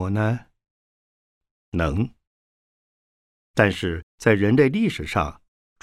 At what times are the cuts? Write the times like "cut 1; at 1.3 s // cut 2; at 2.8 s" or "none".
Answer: none